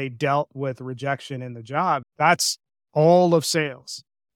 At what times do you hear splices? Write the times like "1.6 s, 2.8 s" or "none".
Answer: 2.0 s